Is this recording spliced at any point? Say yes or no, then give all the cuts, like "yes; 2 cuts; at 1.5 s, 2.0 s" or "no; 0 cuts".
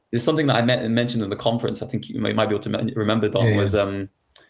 no; 0 cuts